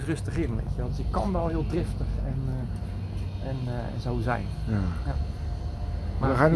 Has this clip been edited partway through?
yes; 1 cut; at 5.0 s

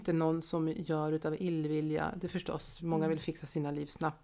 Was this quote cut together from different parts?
yes; 1 cut; at 2.8 s

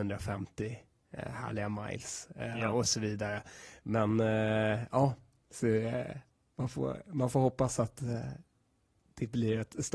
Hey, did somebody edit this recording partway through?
no; 0 cuts

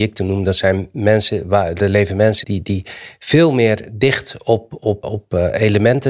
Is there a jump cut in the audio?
yes; 2 cuts; at 2.4 s, 5.0 s

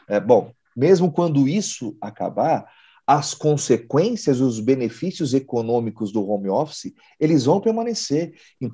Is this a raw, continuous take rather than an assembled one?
yes; 0 cuts

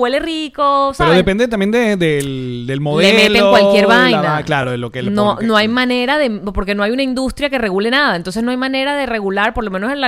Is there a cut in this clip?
no; 0 cuts

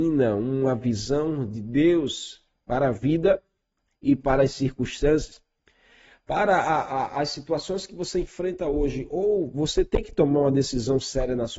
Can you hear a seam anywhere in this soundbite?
no; 0 cuts

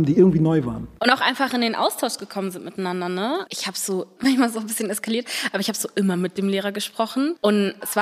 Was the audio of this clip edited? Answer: yes; 1 cut; at 3.5 s

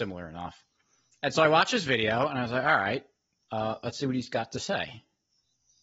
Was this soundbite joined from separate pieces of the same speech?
yes; 1 cut; at 3.4 s

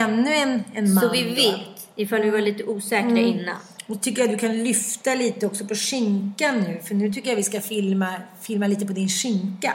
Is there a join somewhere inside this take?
no; 0 cuts

